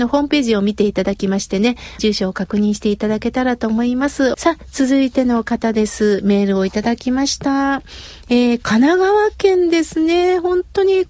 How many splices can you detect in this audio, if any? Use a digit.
2